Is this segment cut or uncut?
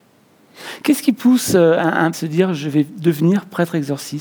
cut